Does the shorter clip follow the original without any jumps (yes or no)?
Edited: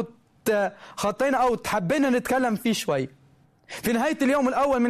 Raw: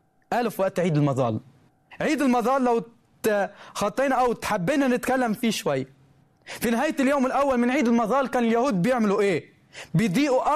yes